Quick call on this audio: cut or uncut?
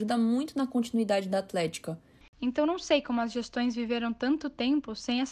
cut